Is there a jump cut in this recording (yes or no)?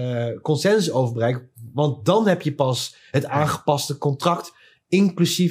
no